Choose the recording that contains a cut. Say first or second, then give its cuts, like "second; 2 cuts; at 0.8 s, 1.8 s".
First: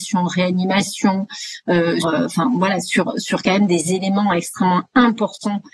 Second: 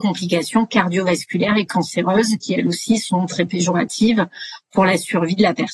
first; 1 cut; at 2.0 s